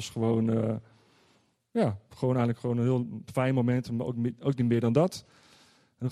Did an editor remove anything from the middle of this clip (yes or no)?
no